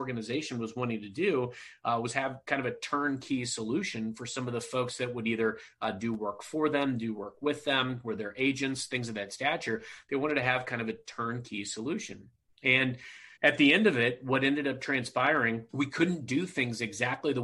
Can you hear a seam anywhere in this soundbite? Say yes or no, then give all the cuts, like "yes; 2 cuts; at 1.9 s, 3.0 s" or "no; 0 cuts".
yes; 2 cuts; at 13.3 s, 15.7 s